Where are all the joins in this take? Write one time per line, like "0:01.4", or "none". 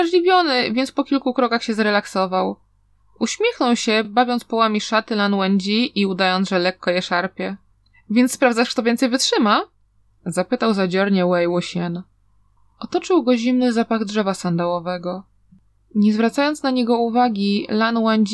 none